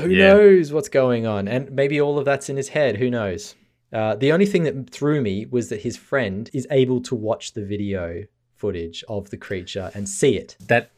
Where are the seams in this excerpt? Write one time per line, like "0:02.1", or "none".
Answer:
0:06.5